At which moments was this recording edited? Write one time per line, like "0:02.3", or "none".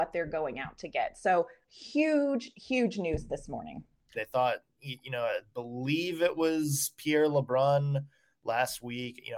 0:04.1